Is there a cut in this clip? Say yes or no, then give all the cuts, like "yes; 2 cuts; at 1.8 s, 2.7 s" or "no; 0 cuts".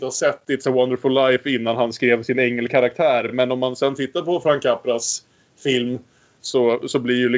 no; 0 cuts